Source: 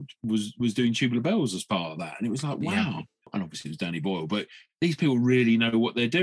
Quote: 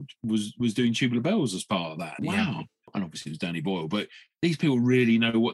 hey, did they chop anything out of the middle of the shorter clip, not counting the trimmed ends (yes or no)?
yes